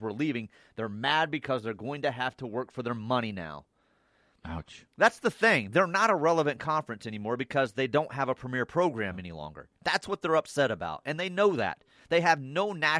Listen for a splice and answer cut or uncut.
uncut